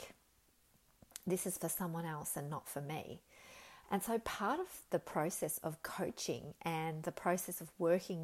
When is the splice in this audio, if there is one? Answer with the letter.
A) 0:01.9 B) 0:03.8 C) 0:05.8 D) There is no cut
B